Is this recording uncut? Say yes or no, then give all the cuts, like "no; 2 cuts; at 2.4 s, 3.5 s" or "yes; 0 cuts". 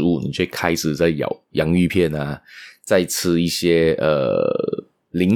yes; 0 cuts